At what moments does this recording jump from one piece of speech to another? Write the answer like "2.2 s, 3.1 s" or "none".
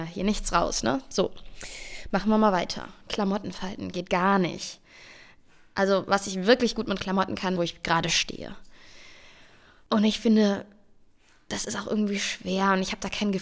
7.5 s